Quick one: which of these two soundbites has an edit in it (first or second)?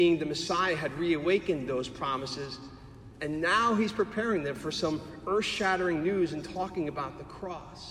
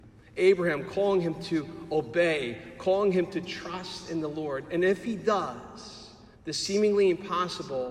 second